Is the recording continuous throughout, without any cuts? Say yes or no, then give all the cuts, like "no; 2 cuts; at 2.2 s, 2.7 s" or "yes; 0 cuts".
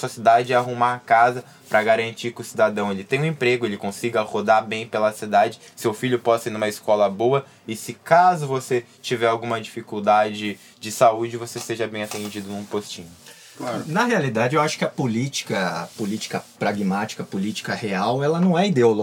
no; 1 cut; at 5.7 s